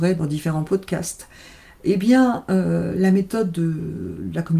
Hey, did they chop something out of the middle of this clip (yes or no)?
no